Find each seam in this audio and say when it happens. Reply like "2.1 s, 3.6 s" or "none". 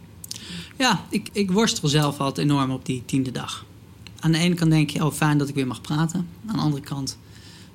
1.3 s